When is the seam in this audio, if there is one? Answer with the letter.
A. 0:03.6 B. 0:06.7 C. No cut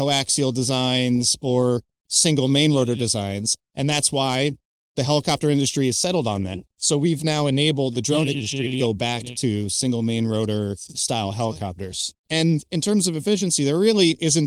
A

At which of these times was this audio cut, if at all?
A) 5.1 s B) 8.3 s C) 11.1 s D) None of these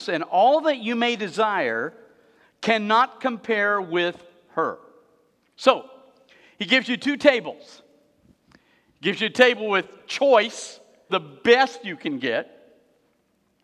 C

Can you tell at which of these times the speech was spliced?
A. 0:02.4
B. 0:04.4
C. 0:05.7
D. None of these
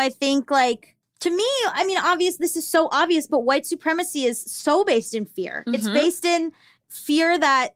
D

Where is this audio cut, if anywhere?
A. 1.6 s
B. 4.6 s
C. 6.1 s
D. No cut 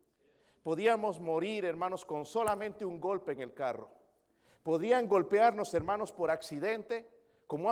D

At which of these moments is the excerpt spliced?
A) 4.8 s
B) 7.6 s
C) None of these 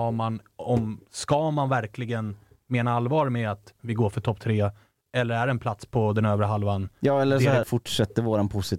B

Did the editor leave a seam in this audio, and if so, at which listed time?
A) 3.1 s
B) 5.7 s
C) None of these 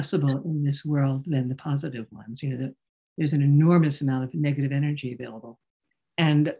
A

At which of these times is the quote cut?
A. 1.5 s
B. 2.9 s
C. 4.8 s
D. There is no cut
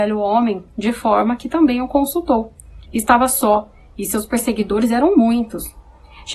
B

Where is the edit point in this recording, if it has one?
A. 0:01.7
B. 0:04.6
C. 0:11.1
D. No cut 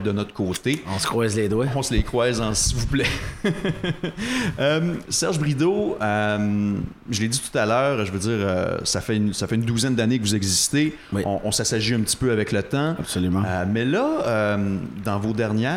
D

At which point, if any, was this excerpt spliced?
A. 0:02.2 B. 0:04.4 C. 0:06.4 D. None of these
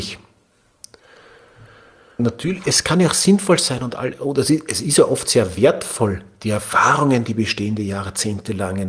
A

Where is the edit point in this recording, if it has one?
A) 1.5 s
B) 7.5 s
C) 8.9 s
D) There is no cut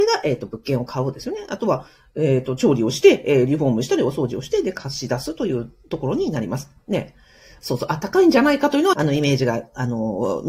C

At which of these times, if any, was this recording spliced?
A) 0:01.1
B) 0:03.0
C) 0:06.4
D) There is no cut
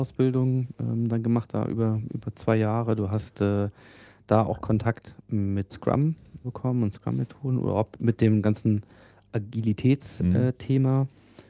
C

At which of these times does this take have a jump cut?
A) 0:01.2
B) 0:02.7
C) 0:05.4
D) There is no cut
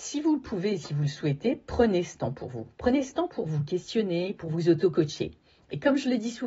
D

